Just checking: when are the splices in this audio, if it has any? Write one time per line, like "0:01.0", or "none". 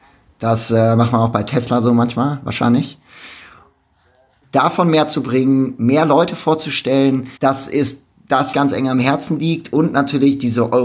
0:04.4
0:07.4
0:08.5